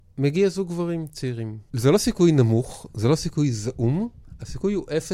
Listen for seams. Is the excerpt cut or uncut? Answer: cut